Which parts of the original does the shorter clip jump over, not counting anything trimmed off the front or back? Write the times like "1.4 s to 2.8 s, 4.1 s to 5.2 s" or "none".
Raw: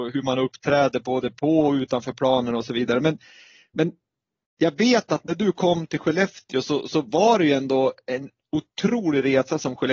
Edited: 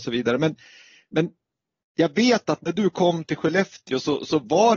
none